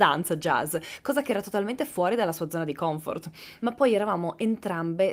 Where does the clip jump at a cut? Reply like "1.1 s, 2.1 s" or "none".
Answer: 3.6 s